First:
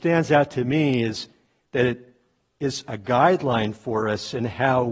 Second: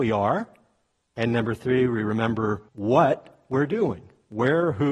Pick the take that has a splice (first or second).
second